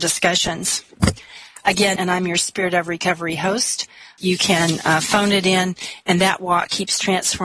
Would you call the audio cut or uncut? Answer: cut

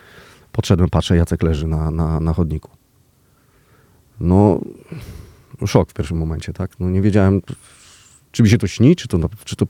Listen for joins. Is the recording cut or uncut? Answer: uncut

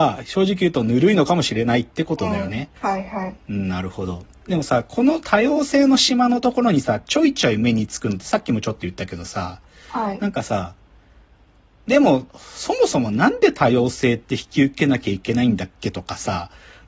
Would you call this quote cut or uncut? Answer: cut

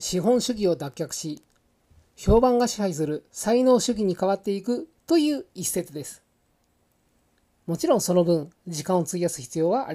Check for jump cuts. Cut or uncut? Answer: cut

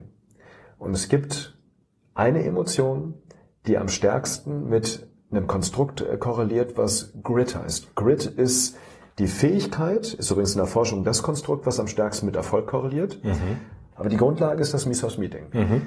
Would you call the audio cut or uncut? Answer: cut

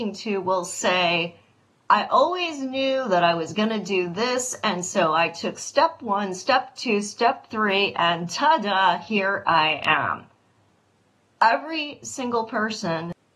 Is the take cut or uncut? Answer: uncut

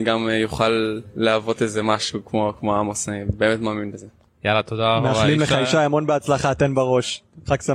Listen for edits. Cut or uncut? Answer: uncut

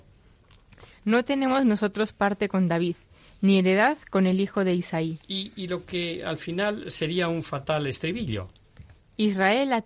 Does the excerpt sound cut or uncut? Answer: uncut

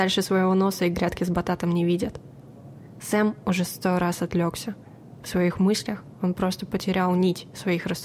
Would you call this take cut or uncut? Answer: uncut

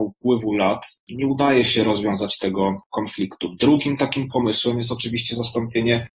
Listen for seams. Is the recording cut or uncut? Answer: uncut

